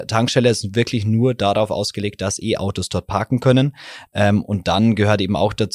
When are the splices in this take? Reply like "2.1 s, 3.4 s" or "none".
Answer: none